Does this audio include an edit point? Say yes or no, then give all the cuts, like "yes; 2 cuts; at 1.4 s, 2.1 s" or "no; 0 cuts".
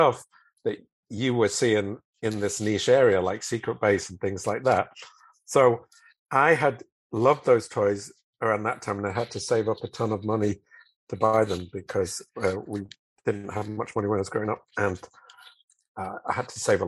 no; 0 cuts